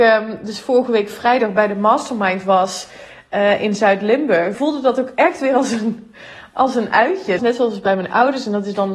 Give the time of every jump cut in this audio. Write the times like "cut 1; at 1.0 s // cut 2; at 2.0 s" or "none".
cut 1; at 4.5 s // cut 2; at 7.4 s